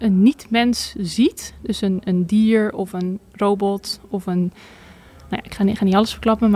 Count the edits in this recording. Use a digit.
0